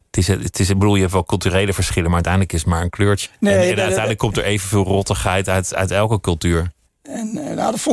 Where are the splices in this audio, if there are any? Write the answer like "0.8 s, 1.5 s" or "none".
3.3 s, 6.9 s